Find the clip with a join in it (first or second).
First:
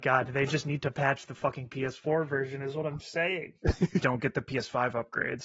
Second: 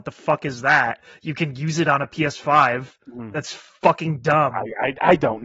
first